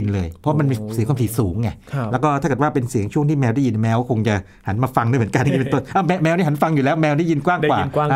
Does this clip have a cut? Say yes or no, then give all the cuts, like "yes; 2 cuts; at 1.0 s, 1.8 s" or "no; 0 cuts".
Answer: yes; 1 cut; at 5.4 s